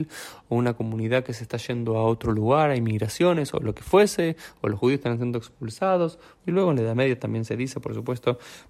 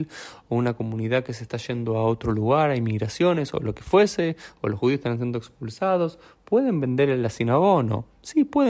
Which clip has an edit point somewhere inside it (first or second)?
first